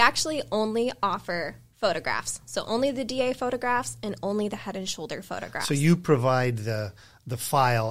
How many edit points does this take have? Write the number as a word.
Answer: zero